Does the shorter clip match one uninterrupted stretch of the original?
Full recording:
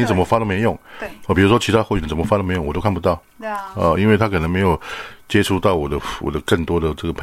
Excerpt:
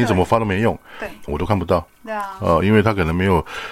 no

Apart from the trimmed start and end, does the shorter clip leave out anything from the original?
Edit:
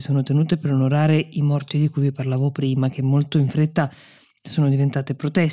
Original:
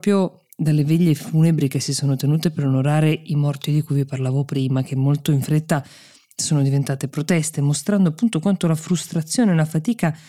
no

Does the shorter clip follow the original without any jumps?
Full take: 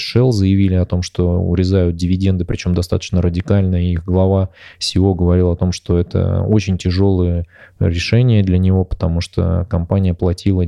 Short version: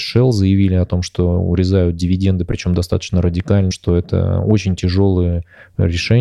no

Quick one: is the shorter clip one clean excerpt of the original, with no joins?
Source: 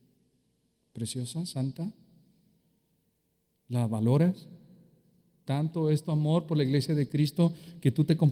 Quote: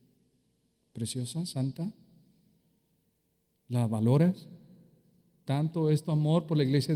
yes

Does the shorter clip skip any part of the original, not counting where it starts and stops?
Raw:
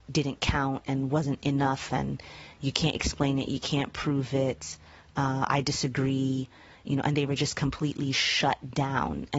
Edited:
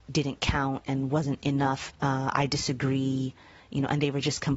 yes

